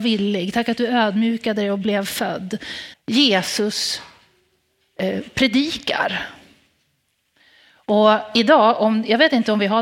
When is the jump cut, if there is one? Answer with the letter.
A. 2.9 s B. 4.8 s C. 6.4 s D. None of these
A